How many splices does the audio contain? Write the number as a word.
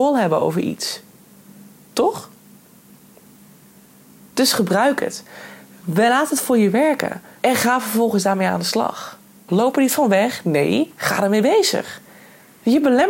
two